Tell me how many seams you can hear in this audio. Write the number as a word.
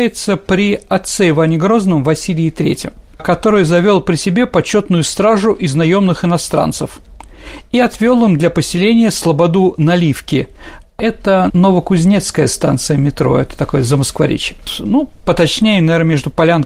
one